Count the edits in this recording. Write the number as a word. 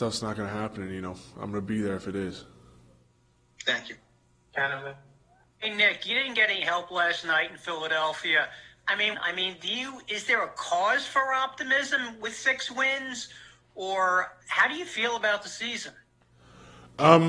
two